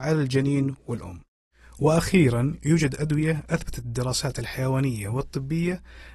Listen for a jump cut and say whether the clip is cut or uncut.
uncut